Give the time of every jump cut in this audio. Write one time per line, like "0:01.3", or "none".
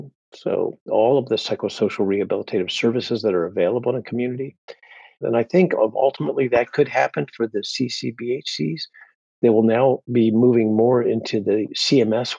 0:05.2